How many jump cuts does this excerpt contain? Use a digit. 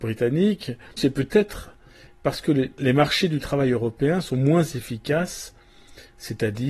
1